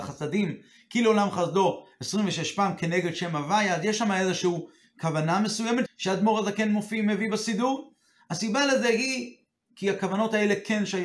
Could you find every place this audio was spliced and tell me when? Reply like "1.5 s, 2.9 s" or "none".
5.9 s

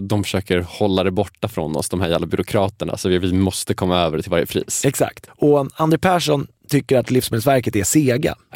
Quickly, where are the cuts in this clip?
5.3 s

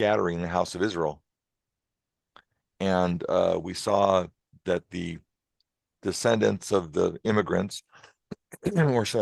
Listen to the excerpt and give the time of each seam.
none

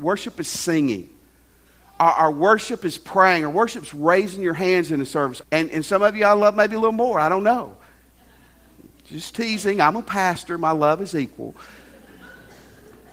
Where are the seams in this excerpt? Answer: 5.4 s

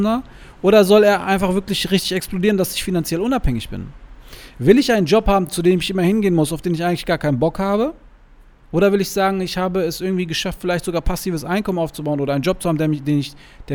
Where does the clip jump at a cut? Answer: none

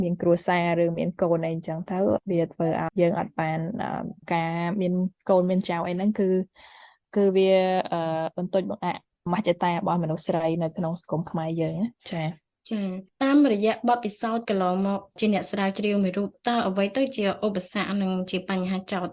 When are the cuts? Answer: 2.9 s

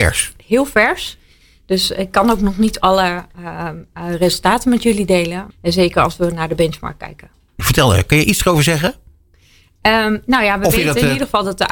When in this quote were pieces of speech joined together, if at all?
5.5 s

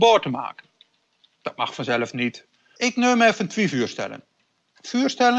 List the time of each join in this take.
2.8 s

